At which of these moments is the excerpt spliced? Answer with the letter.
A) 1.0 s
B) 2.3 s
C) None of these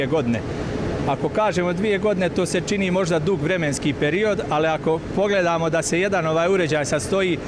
C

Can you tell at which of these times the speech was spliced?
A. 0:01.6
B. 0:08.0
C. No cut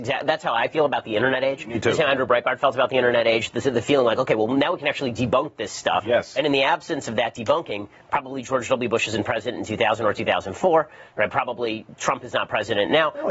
C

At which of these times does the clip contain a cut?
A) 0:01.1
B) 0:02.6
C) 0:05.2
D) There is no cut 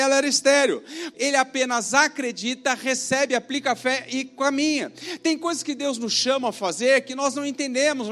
A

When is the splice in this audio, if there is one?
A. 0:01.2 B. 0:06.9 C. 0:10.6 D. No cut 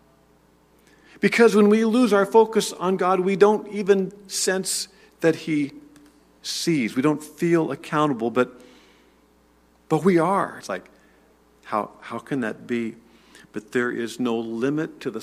C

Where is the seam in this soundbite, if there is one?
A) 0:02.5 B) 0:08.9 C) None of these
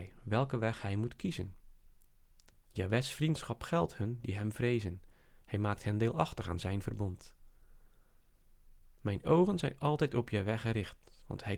A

